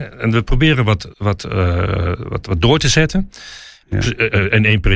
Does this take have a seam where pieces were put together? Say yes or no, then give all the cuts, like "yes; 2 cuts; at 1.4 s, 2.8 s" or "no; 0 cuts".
yes; 2 cuts; at 1.1 s, 3.8 s